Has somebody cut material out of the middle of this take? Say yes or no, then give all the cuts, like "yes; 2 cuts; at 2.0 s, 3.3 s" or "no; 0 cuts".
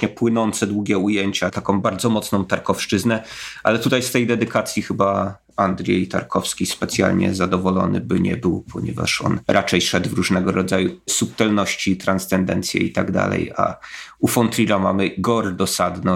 yes; 1 cut; at 9.4 s